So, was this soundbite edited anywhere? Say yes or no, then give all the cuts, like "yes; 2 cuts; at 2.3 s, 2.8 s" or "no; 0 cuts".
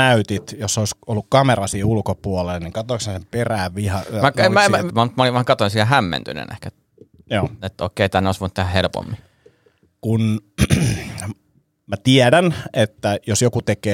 yes; 1 cut; at 4.9 s